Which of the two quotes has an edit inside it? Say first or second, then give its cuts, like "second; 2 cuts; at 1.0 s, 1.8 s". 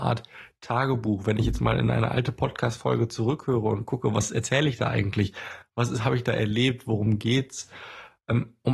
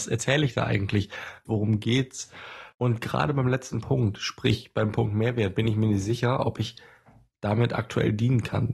second; 2 cuts; at 1.4 s, 2.7 s